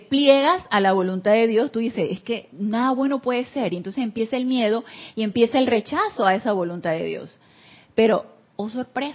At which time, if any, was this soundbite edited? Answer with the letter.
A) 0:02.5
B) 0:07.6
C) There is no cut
A